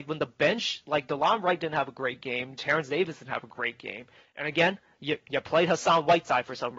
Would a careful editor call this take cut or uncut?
uncut